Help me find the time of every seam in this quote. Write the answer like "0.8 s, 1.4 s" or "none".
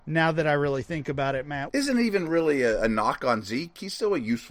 1.7 s